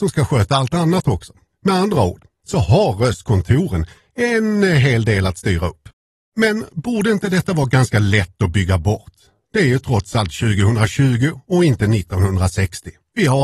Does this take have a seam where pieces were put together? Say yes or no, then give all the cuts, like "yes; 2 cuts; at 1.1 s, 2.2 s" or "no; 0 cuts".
yes; 1 cut; at 1.5 s